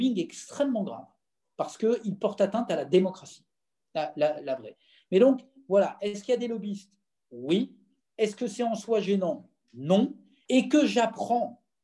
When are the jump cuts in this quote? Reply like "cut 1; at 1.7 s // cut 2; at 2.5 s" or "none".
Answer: cut 1; at 10.5 s

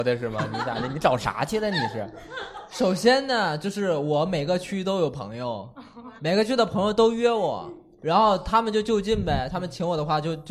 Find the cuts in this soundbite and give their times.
cut 1; at 6.2 s

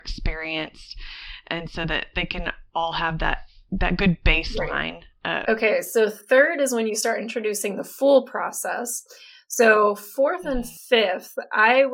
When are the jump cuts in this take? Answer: cut 1; at 5.4 s

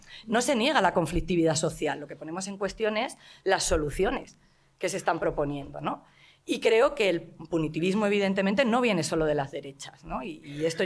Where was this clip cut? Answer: none

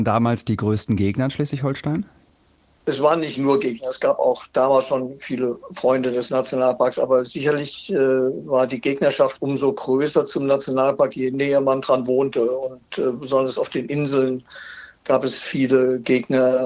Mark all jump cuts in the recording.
none

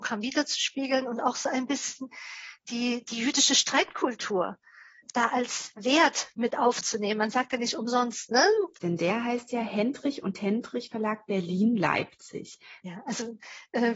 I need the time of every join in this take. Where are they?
cut 1; at 8.7 s // cut 2; at 12.8 s

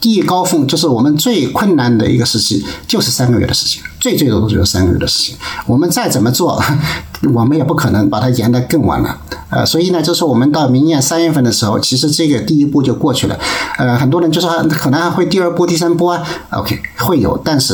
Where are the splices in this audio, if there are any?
none

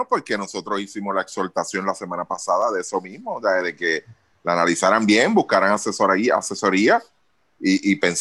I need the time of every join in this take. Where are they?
none

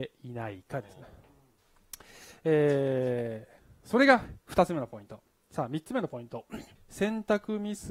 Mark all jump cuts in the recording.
cut 1; at 1.6 s // cut 2; at 6.8 s

